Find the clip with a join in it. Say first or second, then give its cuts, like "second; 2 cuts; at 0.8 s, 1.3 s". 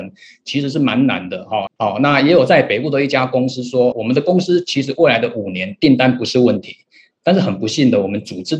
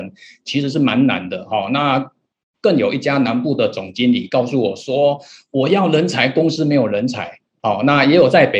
first; 2 cuts; at 1.7 s, 3.9 s